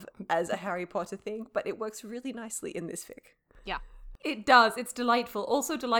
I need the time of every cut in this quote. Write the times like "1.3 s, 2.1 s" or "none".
none